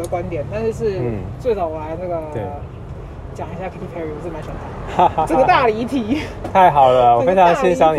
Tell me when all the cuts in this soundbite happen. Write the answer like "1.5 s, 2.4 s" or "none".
none